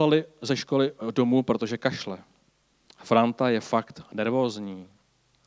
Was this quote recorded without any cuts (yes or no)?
no